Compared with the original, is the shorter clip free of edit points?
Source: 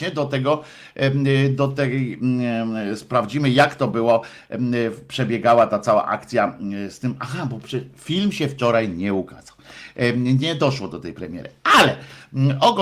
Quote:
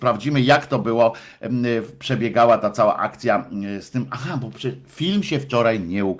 yes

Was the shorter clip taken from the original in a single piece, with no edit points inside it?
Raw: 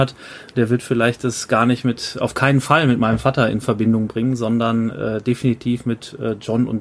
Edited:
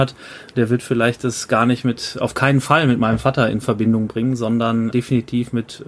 no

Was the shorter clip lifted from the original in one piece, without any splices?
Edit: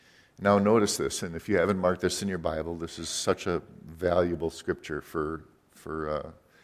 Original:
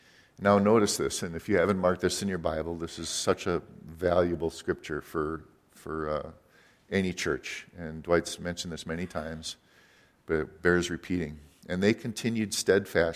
yes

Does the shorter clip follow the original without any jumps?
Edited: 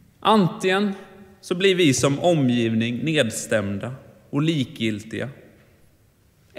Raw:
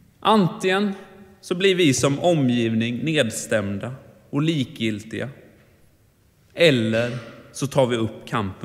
yes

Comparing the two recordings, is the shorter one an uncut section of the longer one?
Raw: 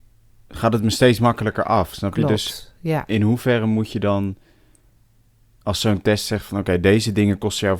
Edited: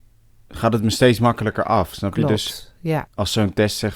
no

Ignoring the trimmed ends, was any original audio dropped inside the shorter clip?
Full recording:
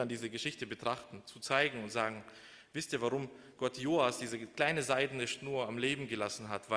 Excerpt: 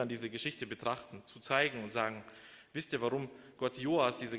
no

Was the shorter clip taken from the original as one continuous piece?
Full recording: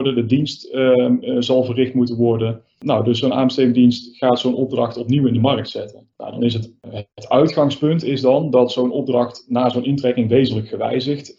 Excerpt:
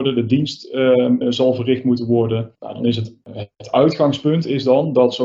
no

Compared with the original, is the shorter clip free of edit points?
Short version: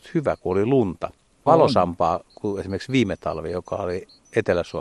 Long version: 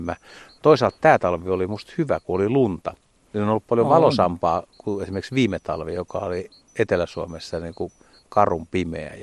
no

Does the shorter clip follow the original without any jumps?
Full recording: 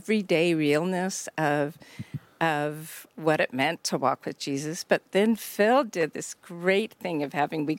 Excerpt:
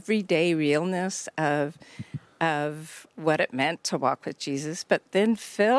yes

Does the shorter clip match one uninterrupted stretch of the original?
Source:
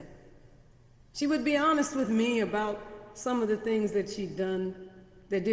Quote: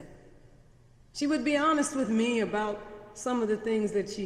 yes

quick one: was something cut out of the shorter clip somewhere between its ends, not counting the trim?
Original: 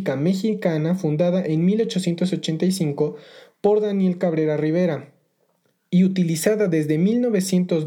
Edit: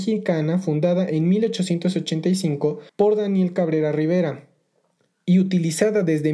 yes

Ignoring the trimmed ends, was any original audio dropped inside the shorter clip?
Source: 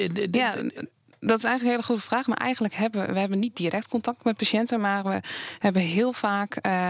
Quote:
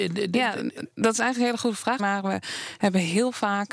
yes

